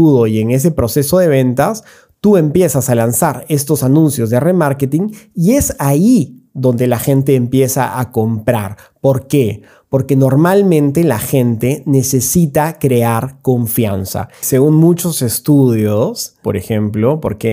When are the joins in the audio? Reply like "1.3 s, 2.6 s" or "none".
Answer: 16.4 s